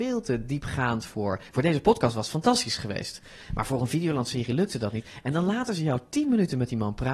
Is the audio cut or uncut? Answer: uncut